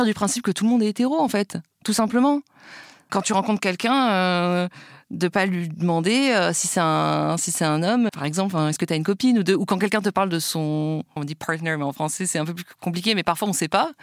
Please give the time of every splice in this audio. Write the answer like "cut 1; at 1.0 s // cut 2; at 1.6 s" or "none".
cut 1; at 8.1 s // cut 2; at 11.2 s